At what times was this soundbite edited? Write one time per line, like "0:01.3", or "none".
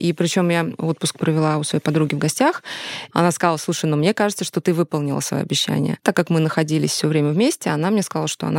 0:03.1